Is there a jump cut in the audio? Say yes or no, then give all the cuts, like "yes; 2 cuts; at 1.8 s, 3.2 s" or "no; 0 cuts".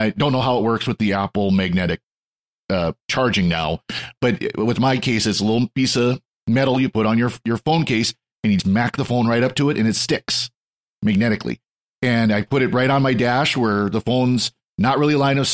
yes; 1 cut; at 8.6 s